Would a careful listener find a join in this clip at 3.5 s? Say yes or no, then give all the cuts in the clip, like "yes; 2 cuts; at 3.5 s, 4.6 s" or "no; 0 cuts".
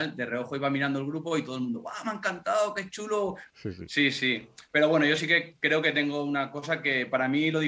yes; 1 cut; at 3.5 s